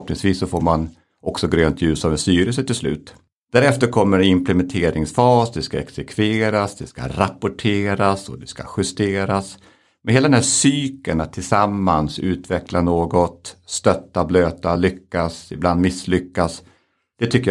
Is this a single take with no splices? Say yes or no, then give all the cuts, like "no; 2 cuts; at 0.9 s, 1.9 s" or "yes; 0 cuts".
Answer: yes; 0 cuts